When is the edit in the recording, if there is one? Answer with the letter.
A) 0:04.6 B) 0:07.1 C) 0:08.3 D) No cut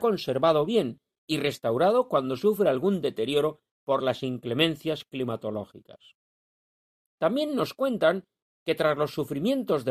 B